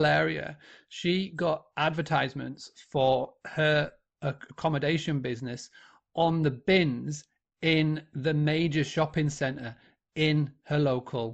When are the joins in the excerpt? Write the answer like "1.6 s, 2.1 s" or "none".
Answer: none